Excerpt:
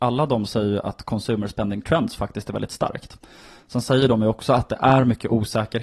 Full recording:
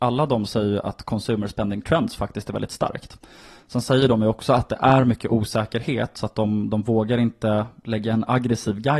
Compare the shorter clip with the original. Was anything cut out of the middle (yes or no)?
no